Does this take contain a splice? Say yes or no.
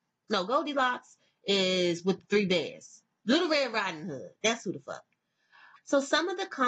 yes